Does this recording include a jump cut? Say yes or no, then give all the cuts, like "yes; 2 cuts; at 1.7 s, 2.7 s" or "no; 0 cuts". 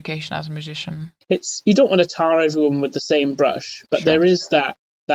yes; 1 cut; at 1.2 s